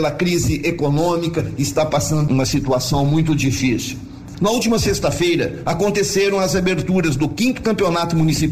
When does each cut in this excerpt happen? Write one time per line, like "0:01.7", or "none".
0:02.3
0:04.3
0:05.6